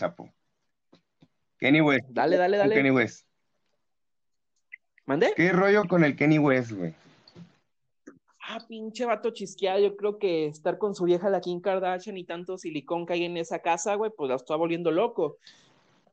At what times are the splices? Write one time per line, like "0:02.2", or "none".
none